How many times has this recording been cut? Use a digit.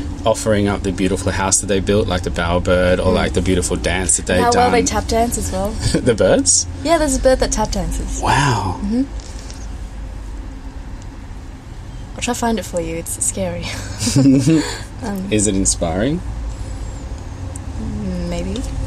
1